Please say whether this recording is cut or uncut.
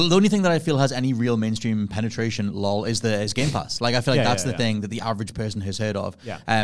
uncut